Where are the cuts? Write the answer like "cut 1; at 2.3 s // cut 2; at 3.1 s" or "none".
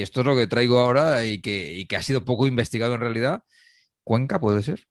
cut 1; at 3.9 s